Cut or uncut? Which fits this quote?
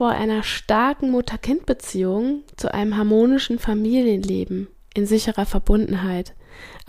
uncut